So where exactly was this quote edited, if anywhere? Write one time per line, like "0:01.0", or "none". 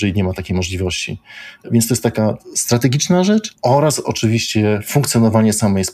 none